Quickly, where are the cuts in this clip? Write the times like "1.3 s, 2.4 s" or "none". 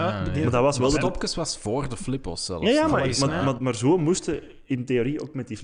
3.6 s